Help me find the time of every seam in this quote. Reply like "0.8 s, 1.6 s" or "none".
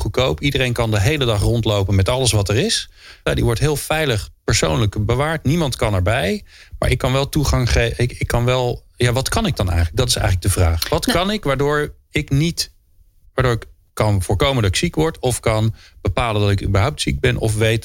3.3 s